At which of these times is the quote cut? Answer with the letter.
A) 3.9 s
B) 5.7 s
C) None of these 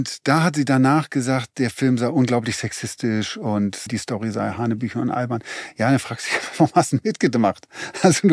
A